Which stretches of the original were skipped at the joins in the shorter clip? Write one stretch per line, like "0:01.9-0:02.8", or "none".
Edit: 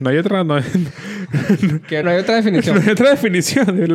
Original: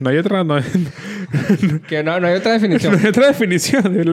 0:02.0-0:02.2